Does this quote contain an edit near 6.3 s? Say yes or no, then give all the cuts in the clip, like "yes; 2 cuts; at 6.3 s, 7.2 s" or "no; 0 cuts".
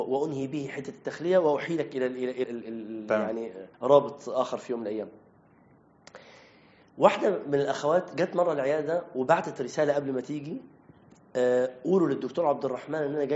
no; 2 cuts; at 2.4 s, 3.7 s